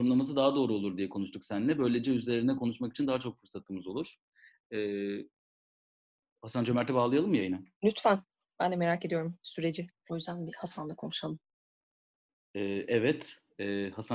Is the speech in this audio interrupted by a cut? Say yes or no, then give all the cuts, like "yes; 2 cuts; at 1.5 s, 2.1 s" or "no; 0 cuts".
yes; 2 cuts; at 7.7 s, 10.1 s